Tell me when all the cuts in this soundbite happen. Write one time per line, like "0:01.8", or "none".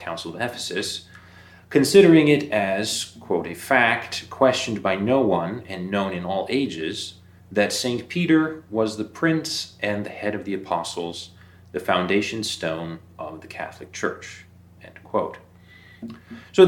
none